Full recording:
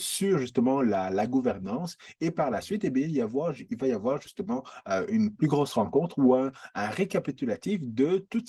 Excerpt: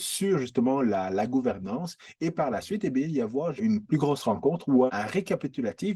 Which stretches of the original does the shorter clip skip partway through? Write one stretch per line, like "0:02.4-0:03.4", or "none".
0:03.6-0:05.1
0:06.4-0:06.7